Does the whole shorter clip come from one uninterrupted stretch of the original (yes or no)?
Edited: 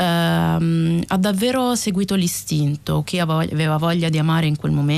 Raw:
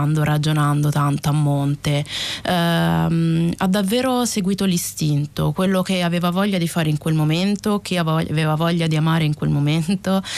no